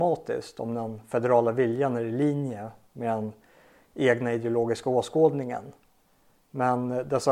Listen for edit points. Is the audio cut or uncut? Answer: cut